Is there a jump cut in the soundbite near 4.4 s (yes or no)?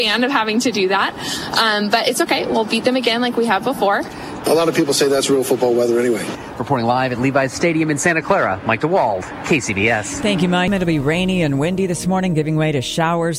yes